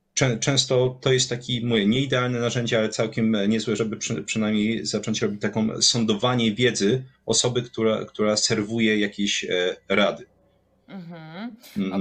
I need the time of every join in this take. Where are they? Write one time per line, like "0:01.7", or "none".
none